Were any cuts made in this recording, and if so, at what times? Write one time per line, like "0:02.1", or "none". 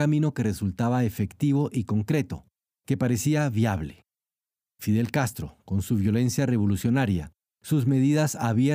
none